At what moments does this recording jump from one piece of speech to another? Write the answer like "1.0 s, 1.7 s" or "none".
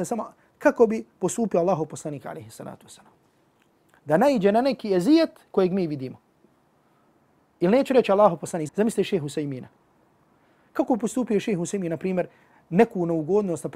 8.7 s